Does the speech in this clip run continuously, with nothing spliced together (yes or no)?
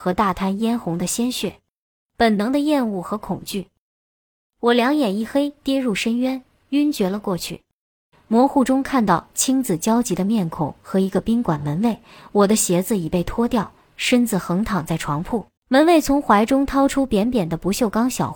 no